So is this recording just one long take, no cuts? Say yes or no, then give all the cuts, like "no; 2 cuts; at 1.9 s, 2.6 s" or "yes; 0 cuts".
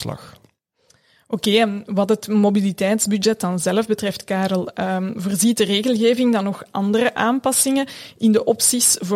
yes; 0 cuts